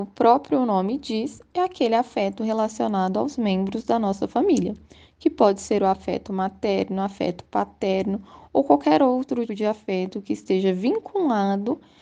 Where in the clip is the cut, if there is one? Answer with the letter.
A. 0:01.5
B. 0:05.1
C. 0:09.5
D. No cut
C